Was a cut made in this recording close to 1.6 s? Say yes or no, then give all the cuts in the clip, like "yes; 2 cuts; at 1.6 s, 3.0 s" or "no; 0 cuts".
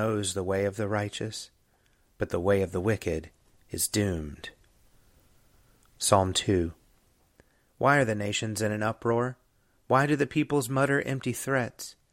no; 0 cuts